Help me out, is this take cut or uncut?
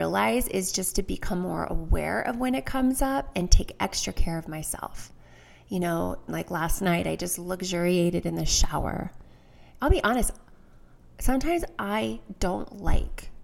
cut